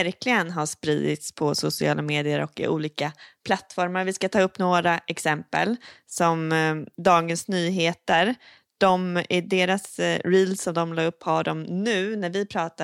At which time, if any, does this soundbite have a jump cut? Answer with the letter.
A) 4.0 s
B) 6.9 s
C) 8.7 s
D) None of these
B